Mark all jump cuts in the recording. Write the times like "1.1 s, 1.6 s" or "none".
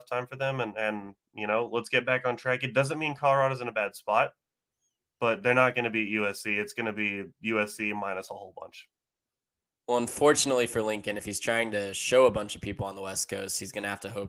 none